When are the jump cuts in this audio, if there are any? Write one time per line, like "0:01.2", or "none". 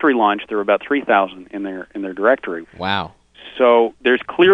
0:02.6